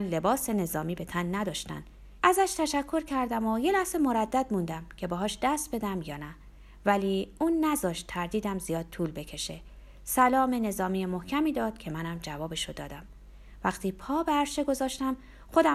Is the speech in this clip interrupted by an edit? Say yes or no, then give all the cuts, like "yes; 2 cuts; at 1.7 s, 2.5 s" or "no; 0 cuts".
yes; 1 cut; at 2.2 s